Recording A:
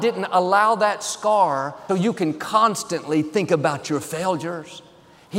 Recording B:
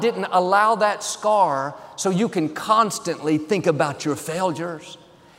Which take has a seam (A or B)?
A